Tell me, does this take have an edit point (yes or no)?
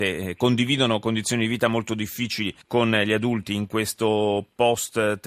yes